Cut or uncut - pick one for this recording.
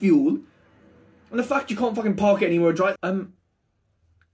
cut